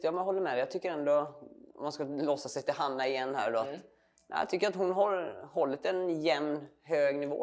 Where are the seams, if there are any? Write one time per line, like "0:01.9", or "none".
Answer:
none